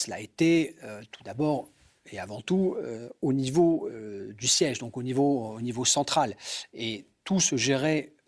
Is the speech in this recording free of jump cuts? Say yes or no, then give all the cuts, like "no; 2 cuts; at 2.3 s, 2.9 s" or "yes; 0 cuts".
yes; 0 cuts